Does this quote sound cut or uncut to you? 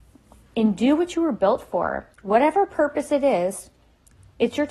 cut